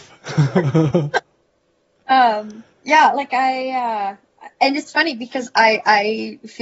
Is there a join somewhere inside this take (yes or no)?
yes